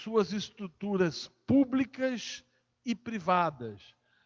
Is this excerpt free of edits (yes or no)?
yes